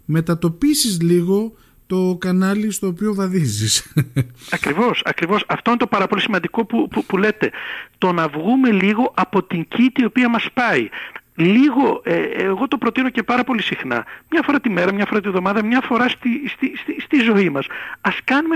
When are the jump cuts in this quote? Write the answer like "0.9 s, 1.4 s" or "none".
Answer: none

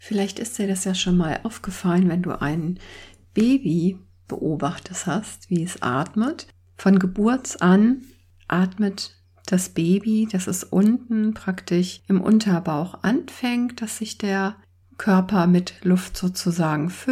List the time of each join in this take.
none

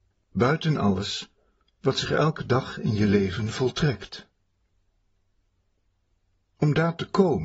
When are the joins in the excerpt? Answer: none

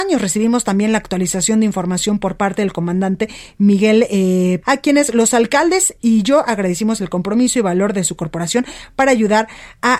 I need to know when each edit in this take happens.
4.6 s

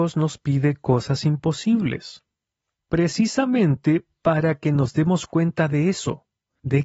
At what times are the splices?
none

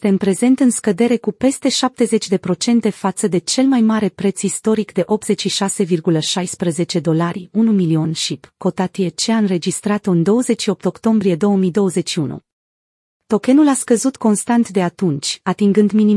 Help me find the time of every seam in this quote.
none

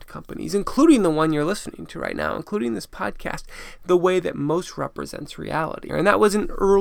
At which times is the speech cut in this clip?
3.8 s, 5.9 s

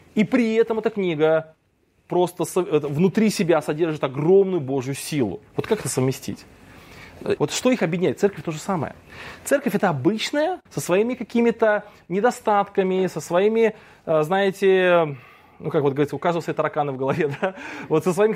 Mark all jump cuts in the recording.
7.4 s, 10.7 s

